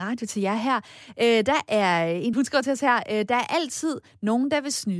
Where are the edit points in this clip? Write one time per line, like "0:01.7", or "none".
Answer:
0:02.3